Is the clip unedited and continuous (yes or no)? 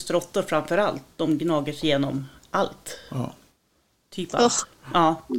yes